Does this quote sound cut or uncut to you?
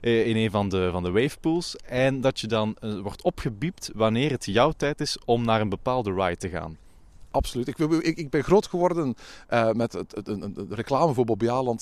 uncut